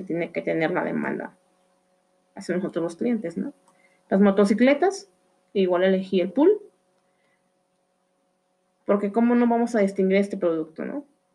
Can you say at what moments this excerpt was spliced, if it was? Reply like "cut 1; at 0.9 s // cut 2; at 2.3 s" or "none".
none